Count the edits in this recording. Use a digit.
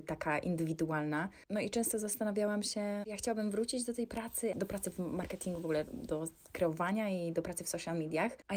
1